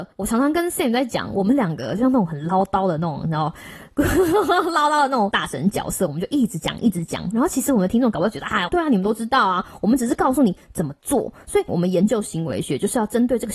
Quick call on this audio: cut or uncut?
cut